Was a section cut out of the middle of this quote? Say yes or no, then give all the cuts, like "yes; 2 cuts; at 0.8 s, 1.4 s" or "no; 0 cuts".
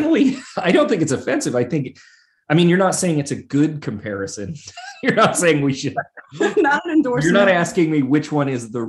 no; 0 cuts